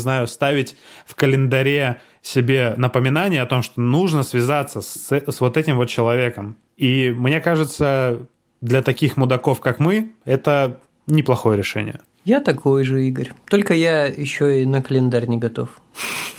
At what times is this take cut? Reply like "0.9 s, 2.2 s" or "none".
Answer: none